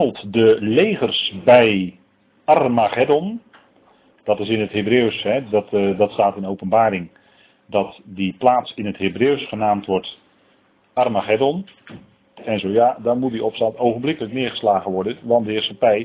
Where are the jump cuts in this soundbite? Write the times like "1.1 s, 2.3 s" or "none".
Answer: 12.4 s